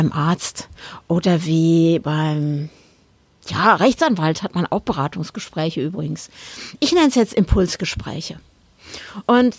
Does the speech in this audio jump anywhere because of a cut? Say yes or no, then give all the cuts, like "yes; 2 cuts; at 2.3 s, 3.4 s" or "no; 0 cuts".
no; 0 cuts